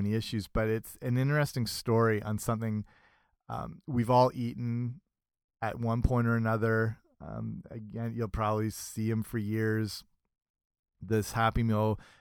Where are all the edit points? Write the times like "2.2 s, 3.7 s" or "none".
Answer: none